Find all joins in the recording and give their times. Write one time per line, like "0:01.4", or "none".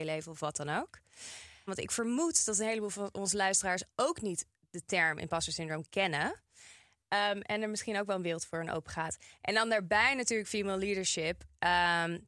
0:01.7